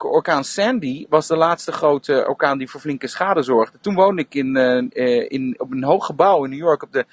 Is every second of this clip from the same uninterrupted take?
yes; 0 cuts

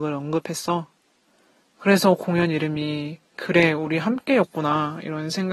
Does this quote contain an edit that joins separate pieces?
yes; 2 cuts; at 1.7 s, 3.3 s

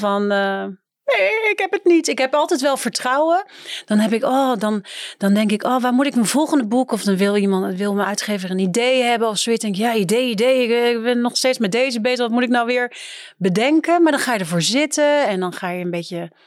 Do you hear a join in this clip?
no; 0 cuts

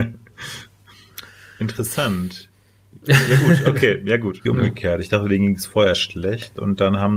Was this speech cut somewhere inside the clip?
yes; 1 cut; at 4.5 s

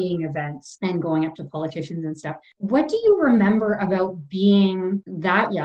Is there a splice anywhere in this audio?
no; 0 cuts

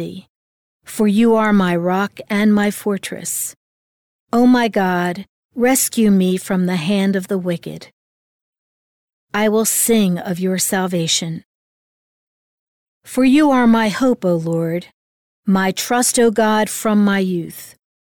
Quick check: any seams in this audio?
no; 0 cuts

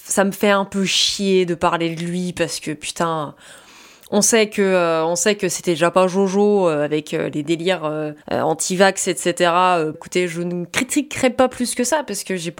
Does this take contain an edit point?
yes; 2 cuts; at 8.2 s, 9.9 s

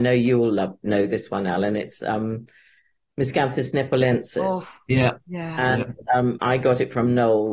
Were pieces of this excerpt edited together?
no; 0 cuts

